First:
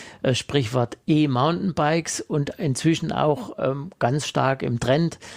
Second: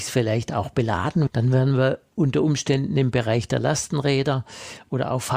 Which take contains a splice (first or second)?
second